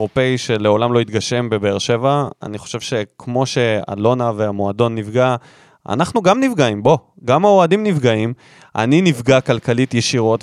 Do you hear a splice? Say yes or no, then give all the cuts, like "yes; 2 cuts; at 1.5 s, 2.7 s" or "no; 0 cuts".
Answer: no; 0 cuts